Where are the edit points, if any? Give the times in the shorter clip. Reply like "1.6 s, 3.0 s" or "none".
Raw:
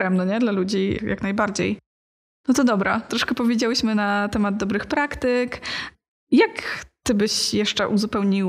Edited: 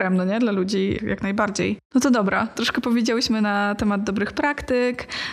1.8 s